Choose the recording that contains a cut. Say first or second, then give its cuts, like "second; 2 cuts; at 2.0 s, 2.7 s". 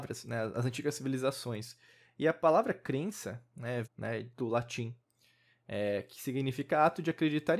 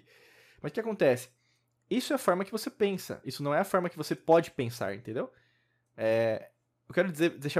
first; 1 cut; at 3.8 s